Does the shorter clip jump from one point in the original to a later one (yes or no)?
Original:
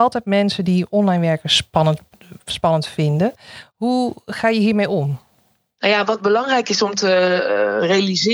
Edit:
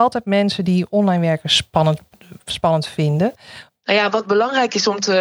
yes